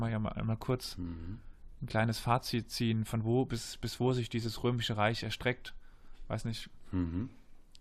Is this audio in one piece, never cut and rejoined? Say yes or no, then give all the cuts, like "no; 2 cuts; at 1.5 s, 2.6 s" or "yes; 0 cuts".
yes; 0 cuts